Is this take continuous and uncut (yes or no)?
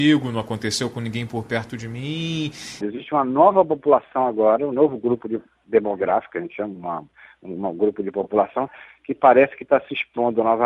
no